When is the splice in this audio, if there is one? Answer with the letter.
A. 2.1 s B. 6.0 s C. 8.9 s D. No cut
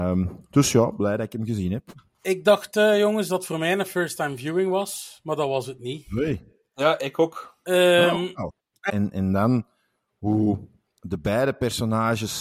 C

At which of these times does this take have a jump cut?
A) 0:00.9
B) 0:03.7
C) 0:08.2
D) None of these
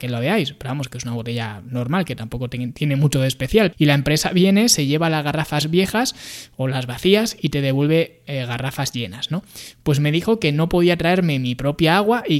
B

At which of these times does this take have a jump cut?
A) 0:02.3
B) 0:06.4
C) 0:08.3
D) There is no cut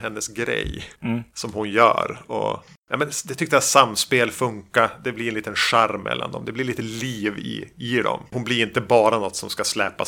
C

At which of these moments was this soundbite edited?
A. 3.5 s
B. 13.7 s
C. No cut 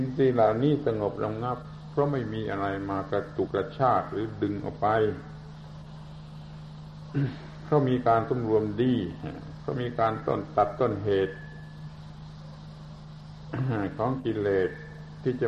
A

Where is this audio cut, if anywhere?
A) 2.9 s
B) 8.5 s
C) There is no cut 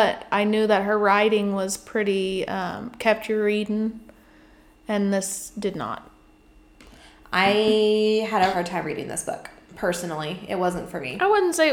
B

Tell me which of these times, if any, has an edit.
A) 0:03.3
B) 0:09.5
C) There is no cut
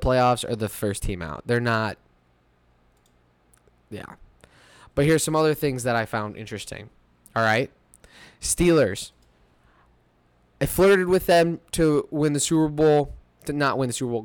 C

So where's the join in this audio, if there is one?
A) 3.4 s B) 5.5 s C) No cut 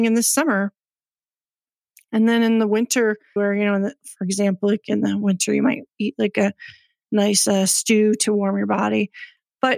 A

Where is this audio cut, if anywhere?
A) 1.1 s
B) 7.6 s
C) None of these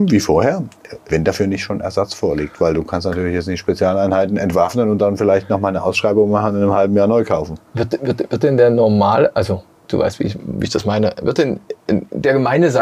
A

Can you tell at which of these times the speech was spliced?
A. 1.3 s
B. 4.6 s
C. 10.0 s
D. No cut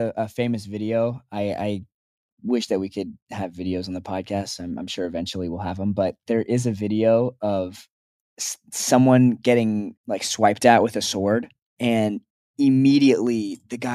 C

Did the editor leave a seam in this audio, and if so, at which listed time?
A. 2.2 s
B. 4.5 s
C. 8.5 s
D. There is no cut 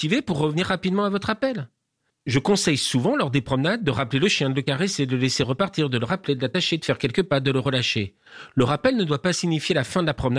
D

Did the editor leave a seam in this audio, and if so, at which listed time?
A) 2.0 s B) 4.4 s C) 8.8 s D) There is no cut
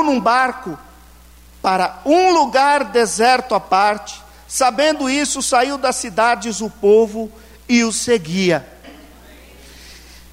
C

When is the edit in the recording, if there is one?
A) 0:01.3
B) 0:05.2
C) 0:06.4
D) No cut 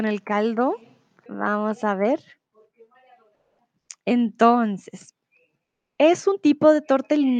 A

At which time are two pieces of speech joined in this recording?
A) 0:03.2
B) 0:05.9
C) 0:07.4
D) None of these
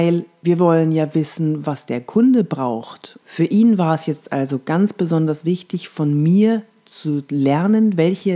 A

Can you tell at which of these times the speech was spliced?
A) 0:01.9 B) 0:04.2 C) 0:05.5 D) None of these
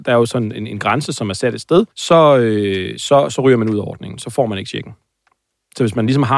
A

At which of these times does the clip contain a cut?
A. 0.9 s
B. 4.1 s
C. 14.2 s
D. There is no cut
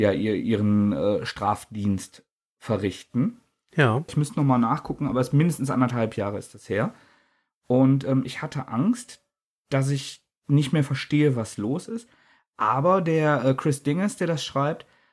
B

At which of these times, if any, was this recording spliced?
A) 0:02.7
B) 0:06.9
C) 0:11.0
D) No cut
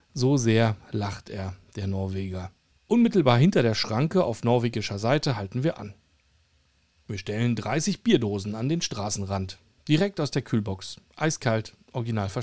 A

